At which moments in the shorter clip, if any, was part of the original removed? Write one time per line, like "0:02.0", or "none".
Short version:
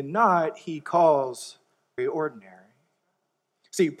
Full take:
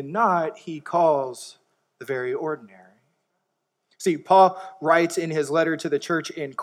0:02.0